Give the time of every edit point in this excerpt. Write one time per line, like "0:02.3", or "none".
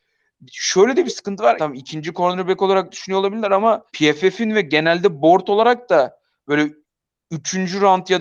0:01.6
0:03.9

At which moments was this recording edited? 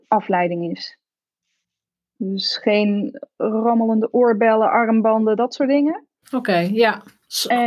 0:06.2

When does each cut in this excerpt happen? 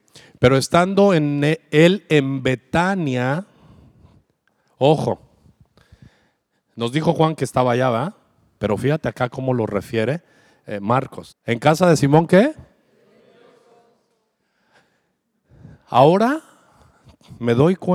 0:08.6
0:11.3

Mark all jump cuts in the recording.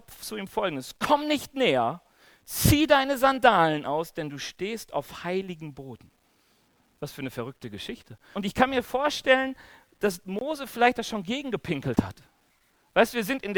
0:08.3

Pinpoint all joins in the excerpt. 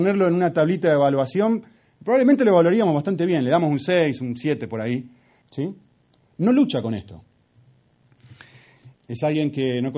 0:05.4
0:08.9

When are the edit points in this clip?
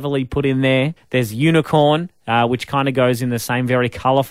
0:01.0

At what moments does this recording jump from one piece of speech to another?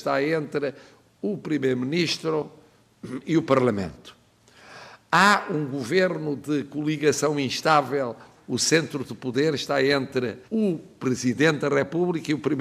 0:08.4
0:10.4

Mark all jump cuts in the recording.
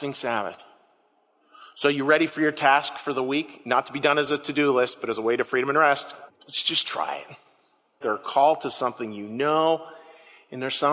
0:06.3
0:08.0

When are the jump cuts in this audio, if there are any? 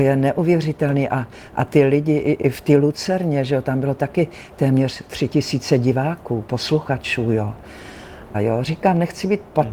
0:02.4
0:08.3

